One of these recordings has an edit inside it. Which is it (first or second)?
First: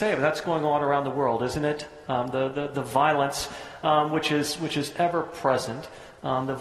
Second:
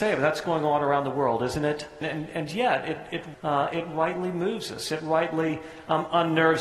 second